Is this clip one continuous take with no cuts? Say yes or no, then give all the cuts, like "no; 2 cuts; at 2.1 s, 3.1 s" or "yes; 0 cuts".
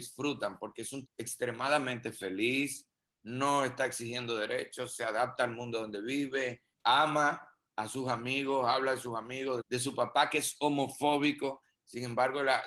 no; 3 cuts; at 1.1 s, 6.7 s, 9.6 s